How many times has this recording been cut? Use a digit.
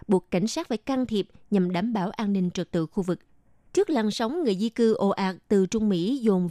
1